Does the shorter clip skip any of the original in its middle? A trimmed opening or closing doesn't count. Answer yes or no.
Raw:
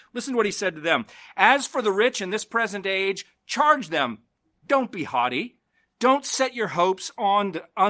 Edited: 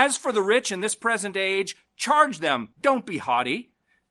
yes